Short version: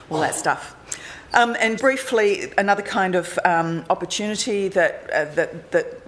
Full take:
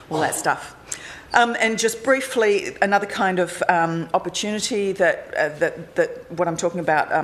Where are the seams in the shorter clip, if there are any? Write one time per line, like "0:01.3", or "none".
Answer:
0:01.8